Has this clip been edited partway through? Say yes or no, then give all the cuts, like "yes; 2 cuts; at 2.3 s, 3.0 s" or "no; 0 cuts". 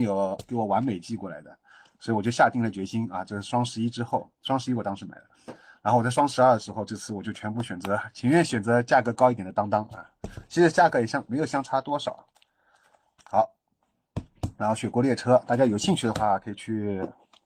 no; 0 cuts